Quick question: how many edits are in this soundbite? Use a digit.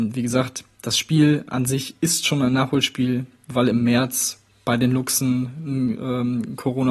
0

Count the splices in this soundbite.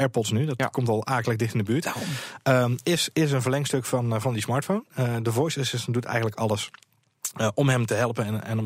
0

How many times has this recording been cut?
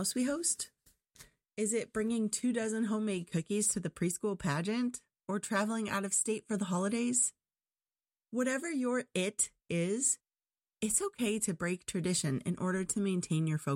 0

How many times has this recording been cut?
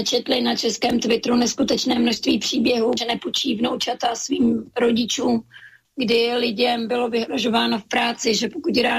2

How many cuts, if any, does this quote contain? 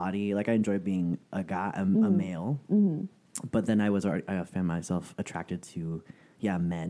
0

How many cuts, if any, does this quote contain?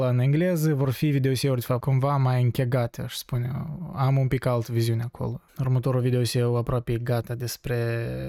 2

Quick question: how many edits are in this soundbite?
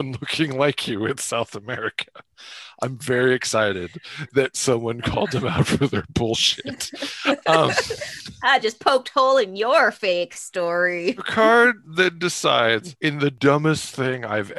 0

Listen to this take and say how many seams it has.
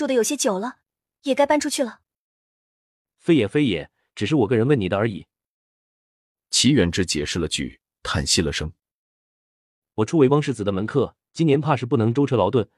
2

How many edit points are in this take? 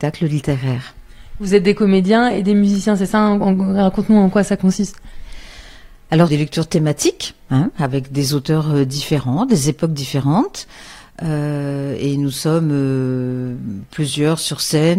1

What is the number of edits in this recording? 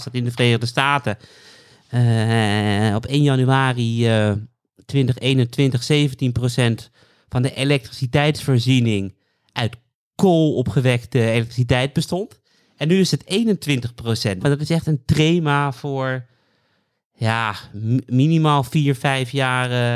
1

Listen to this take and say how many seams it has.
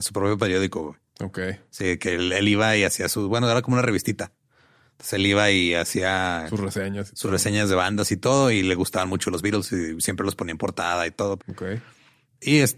1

